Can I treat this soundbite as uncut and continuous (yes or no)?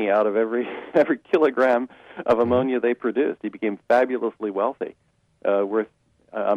yes